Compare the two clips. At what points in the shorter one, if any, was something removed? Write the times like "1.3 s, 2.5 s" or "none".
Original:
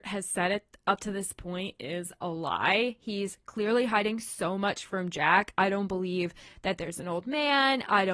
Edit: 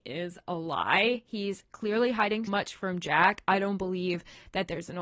2.5 s